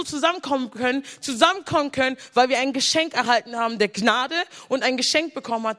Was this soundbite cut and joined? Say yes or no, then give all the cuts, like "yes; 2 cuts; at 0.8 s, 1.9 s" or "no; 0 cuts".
no; 0 cuts